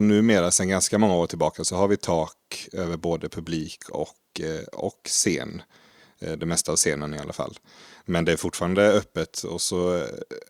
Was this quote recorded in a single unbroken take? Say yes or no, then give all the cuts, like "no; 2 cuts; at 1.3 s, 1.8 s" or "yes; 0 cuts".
yes; 0 cuts